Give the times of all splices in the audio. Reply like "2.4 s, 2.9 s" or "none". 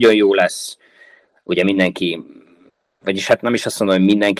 none